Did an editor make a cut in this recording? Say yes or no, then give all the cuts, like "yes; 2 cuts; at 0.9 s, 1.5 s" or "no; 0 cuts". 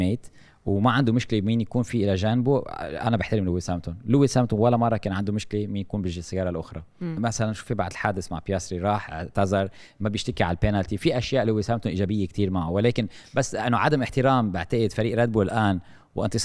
yes; 1 cut; at 7.2 s